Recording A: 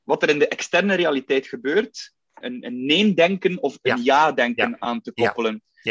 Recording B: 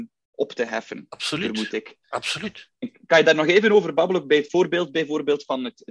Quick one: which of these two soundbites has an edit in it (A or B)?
A